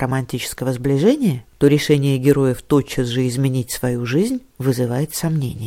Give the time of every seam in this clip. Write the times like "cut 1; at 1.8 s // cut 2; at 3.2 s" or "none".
none